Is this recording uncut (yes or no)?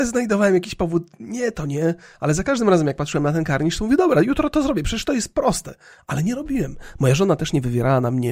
yes